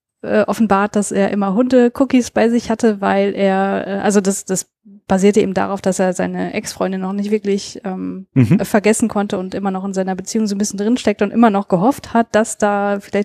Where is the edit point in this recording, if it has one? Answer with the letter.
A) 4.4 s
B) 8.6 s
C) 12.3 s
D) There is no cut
D